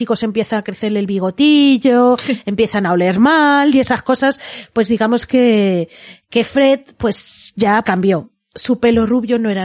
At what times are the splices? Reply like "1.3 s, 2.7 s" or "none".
7.8 s